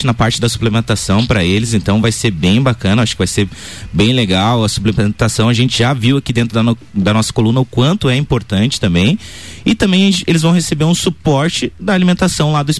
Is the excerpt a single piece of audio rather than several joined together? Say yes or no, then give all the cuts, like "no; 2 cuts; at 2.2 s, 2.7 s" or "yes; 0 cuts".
yes; 0 cuts